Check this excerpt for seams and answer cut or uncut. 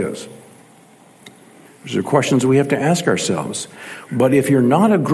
cut